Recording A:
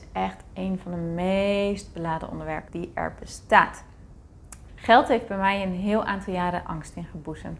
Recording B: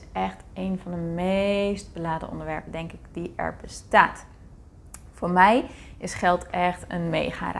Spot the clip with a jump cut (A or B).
A